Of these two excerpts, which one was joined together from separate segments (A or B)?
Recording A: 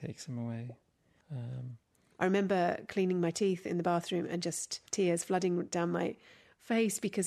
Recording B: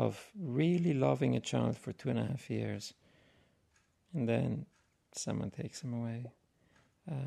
A